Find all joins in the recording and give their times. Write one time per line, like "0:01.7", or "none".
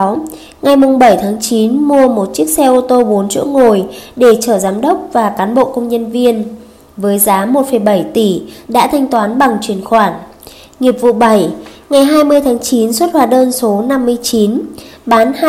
0:08.7